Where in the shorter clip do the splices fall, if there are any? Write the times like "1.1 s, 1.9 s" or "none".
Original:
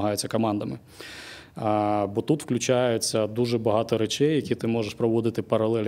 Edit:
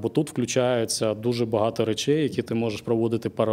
none

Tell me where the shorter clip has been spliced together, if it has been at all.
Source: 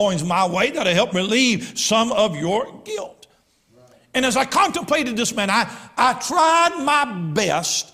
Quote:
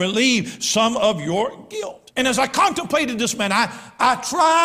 2.1 s

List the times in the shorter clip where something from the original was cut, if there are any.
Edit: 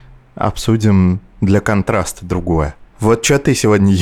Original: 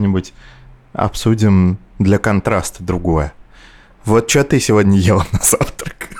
2.9 s

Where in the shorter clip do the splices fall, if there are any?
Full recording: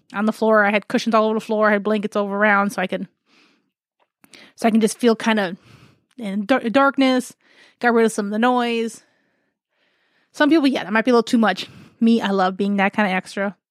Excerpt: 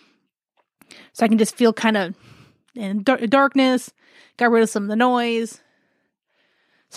none

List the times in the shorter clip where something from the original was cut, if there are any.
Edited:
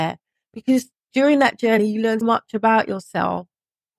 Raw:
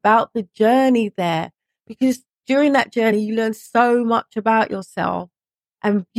2.2 s

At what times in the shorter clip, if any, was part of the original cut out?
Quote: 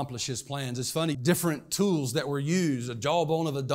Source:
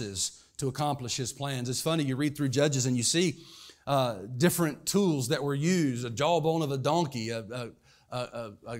1.1 s

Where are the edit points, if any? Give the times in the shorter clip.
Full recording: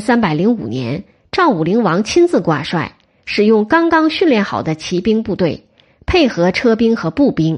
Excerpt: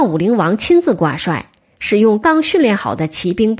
2.2 s

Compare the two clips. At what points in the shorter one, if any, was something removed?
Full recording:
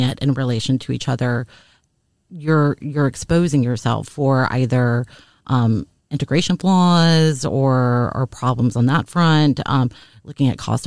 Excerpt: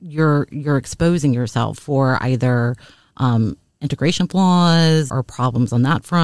5.1 s

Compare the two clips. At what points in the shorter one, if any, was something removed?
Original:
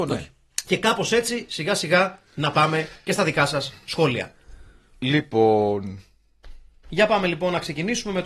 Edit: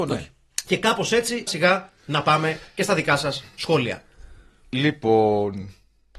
1.5 s

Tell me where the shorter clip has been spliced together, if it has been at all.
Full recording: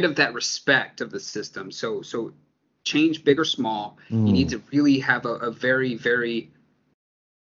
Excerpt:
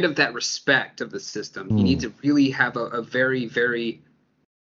1.7 s

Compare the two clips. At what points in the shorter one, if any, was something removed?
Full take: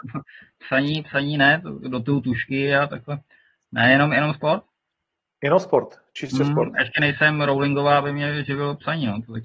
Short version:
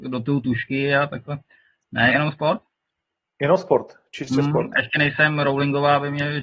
2.1 s

